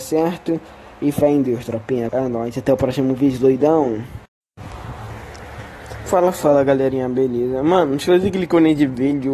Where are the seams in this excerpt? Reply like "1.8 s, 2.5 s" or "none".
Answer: 2.1 s